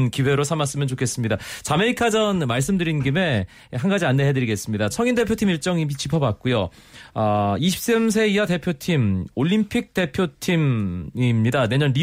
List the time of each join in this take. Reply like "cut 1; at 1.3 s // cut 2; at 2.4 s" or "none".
cut 1; at 4.9 s

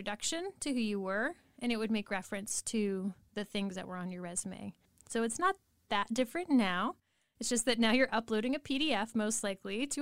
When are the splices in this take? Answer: none

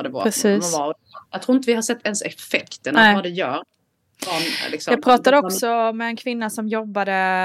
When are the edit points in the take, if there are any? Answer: cut 1; at 1.3 s

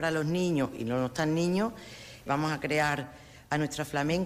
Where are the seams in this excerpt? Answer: cut 1; at 2.3 s

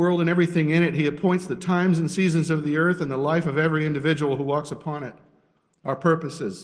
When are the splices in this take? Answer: none

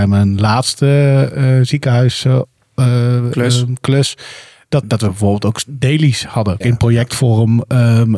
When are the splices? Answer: cut 1; at 4.8 s // cut 2; at 6.6 s

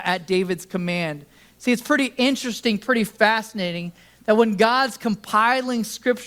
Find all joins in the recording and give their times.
none

